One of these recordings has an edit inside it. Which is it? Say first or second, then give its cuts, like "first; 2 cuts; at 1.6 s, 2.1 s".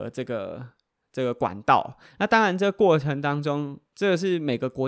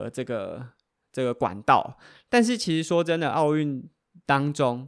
first; 1 cut; at 2.1 s